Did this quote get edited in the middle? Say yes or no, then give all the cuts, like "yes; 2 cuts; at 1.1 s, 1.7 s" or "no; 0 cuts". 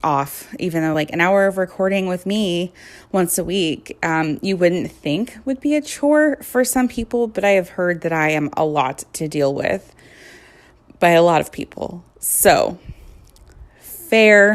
no; 0 cuts